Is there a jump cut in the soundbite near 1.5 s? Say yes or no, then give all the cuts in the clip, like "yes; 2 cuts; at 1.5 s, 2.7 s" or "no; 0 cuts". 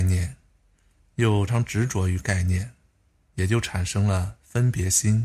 yes; 2 cuts; at 1.5 s, 3.2 s